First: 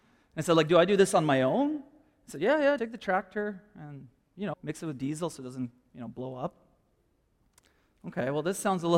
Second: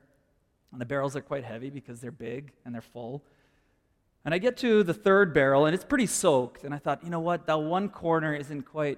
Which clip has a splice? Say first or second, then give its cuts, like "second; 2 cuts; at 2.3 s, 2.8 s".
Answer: first; 2 cuts; at 2.8 s, 4.5 s